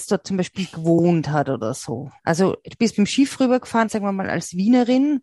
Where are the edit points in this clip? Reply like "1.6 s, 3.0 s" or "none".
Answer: 2.2 s, 3.9 s